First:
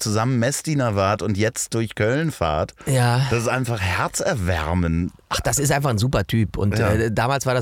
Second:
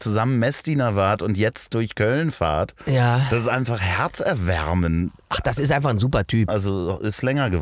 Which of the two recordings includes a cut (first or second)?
second